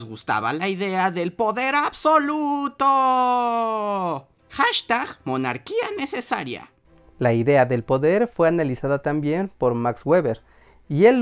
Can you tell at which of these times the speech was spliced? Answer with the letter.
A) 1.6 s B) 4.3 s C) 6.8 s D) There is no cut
D